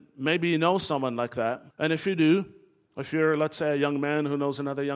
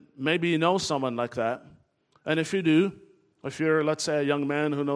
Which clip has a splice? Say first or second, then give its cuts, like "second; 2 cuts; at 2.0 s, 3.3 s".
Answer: first; 1 cut; at 1.7 s